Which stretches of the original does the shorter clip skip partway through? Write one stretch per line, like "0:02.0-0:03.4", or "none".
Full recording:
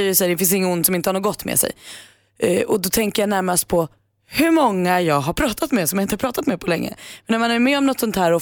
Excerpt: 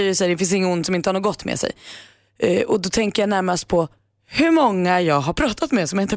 none